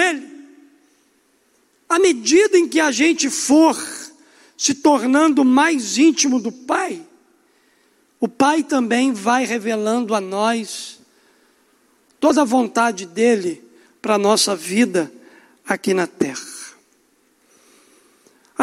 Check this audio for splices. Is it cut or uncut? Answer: uncut